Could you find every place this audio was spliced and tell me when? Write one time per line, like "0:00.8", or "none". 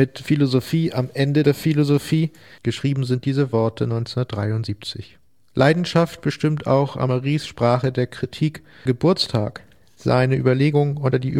0:02.6
0:08.9